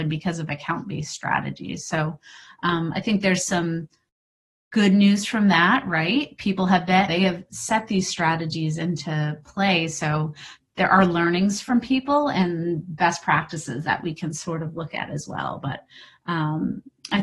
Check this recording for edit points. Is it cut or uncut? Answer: cut